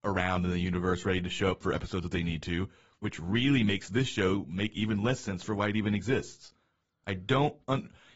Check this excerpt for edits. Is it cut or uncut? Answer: uncut